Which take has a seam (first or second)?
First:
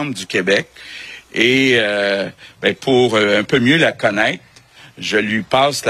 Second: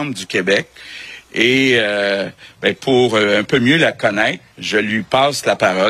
second